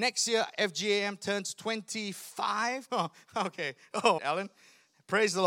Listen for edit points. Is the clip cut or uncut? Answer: cut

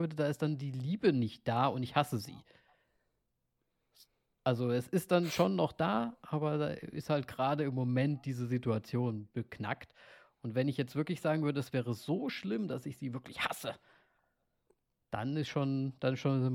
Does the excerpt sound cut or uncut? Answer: uncut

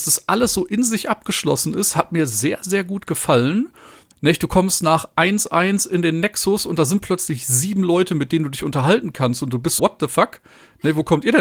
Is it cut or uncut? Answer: cut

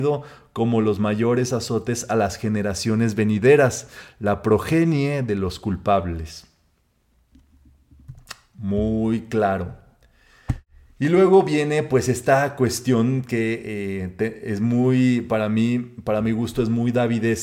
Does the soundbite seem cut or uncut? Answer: uncut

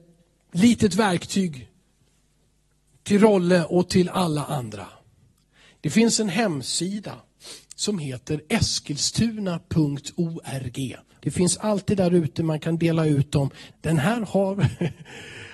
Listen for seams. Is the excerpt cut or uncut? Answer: cut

